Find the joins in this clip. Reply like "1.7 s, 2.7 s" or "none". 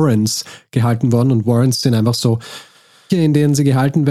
3.1 s